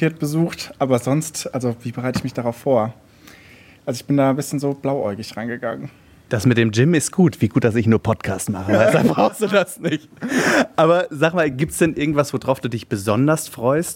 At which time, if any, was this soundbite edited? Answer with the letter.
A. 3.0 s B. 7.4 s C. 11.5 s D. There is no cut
D